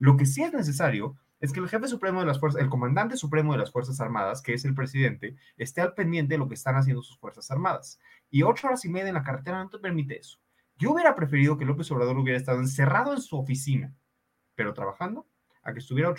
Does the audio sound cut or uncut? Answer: uncut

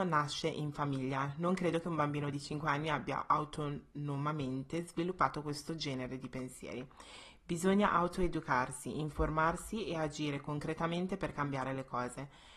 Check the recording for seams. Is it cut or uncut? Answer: uncut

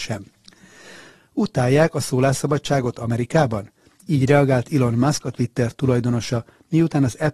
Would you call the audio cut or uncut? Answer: uncut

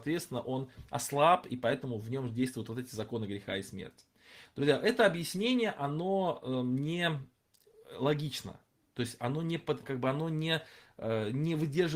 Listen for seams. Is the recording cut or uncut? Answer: cut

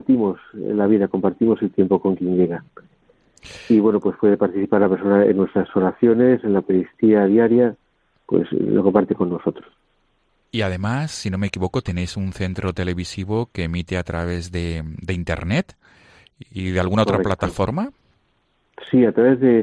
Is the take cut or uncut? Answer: uncut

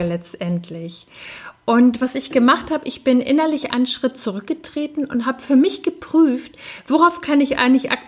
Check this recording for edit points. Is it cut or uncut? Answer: uncut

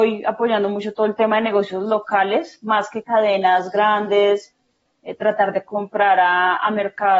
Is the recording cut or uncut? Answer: uncut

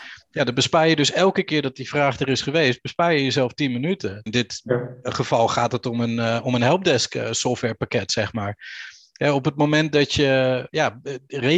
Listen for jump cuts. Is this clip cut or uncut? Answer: cut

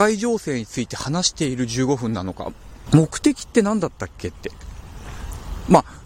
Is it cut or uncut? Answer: cut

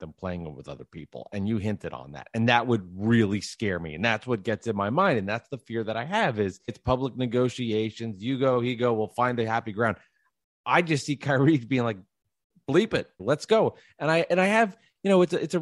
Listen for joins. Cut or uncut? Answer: cut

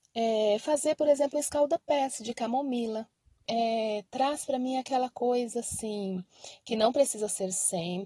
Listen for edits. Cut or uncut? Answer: cut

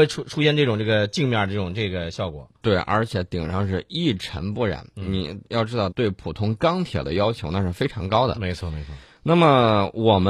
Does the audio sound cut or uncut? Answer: cut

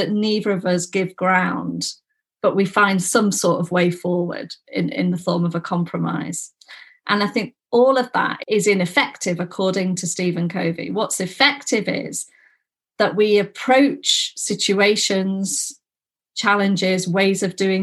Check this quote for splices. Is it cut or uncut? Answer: uncut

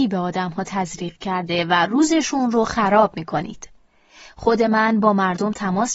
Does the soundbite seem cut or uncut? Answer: uncut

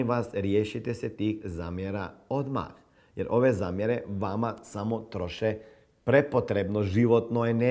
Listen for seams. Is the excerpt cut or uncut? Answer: uncut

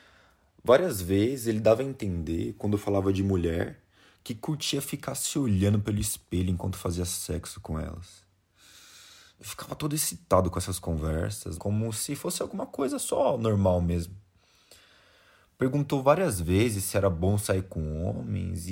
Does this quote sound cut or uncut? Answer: cut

